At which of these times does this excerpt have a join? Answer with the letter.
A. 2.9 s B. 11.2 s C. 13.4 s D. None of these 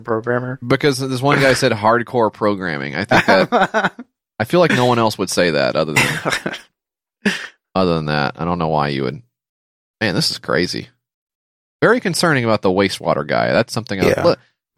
D